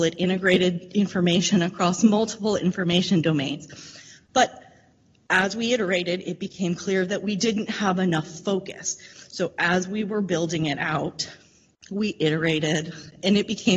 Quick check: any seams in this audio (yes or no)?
no